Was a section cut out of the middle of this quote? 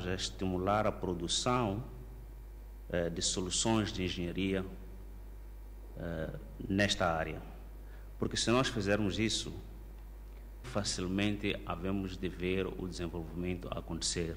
yes; 1 cut; at 10.6 s

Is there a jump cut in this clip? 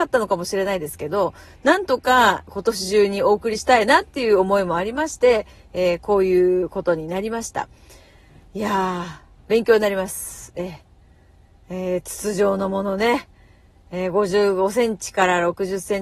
no; 0 cuts

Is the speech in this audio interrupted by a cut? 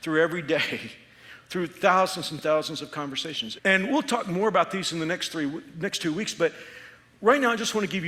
yes; 1 cut; at 3.6 s

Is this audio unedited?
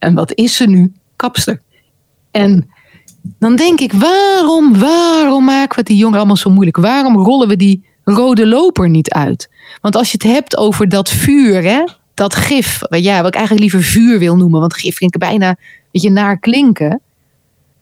yes; 0 cuts

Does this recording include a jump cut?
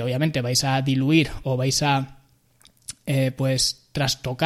no; 0 cuts

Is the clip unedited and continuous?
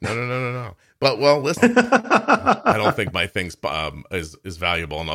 no; 1 cut; at 1.6 s

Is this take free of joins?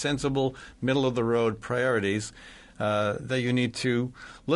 yes; 0 cuts

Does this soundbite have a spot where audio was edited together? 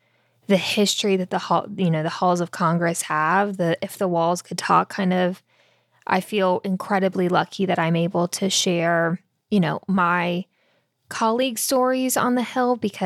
no; 0 cuts

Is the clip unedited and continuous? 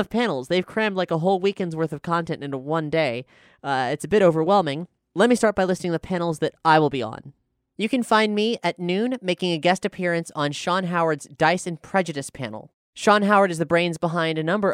yes; 0 cuts

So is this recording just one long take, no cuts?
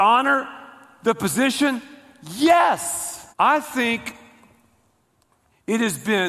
no; 1 cut; at 3.3 s

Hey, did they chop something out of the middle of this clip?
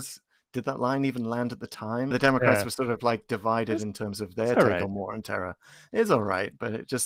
yes; 1 cut; at 2.1 s

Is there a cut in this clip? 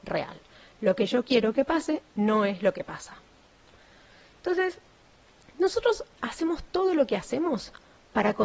no; 0 cuts

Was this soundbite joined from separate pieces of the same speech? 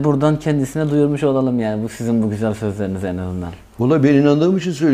no; 0 cuts

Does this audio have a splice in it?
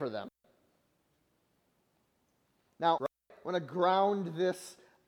yes; 1 cut; at 3.0 s

